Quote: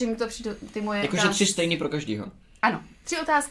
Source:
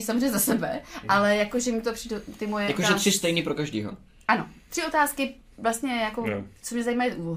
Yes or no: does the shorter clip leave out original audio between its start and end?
no